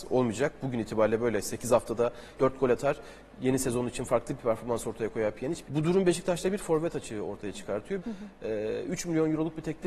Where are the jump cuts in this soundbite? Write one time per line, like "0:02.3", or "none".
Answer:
0:02.4
0:05.6
0:08.0